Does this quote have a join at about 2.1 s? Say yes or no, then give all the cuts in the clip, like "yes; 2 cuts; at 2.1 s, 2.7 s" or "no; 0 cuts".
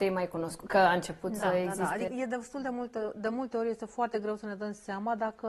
yes; 1 cut; at 2.1 s